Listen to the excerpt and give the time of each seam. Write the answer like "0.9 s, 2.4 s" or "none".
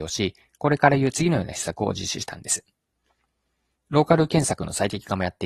3.7 s